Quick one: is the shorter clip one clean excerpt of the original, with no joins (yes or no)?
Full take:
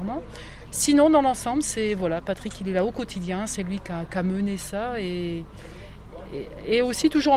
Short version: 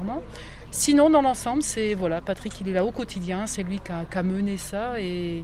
yes